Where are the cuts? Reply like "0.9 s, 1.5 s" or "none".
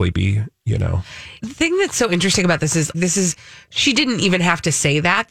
1.4 s, 2.9 s